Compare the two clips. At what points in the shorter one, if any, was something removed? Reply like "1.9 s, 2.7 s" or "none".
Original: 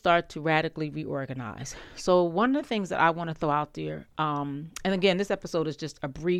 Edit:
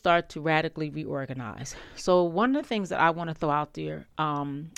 none